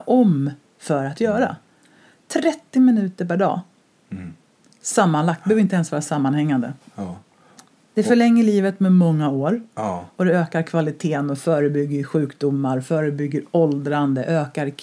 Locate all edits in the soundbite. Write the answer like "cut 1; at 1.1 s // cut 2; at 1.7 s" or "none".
none